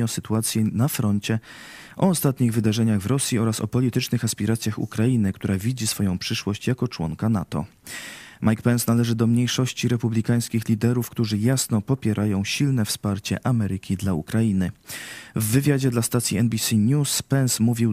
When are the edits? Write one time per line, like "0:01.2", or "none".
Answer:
none